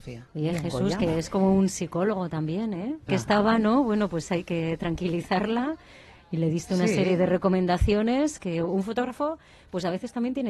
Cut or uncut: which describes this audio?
cut